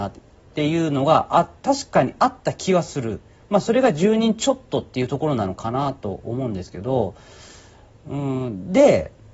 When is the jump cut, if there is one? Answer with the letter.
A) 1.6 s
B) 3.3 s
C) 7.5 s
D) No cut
A